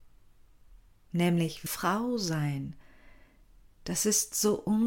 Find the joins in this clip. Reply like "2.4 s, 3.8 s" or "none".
1.7 s